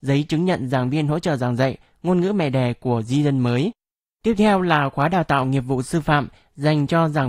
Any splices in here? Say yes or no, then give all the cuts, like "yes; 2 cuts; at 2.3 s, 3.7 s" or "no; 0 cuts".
yes; 1 cut; at 4.0 s